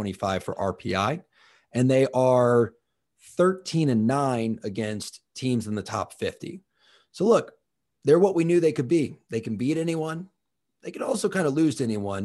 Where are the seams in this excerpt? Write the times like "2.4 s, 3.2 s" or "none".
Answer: none